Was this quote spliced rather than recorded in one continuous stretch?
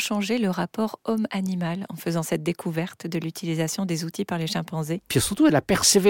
yes; 1 cut; at 5.1 s

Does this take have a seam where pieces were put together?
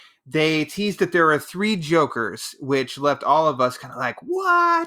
no; 0 cuts

